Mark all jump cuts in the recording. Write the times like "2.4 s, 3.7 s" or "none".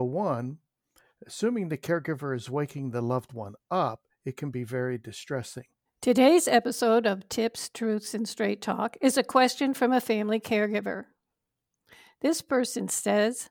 5.9 s